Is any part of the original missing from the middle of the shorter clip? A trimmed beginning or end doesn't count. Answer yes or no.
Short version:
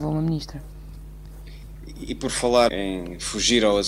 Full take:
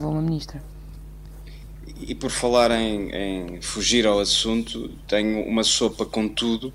yes